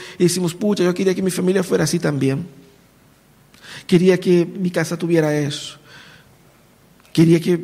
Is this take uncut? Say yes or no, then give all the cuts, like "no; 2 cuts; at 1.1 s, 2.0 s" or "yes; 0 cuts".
yes; 0 cuts